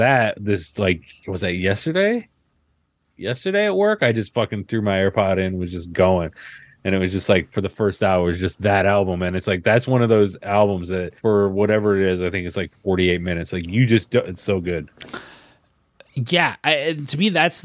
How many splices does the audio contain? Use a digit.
2